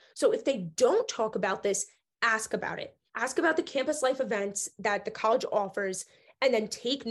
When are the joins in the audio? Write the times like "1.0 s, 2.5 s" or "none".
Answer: 3.1 s